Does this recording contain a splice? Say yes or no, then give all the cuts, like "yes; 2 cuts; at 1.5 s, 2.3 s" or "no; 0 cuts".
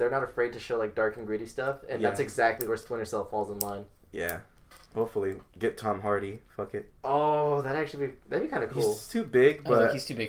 no; 0 cuts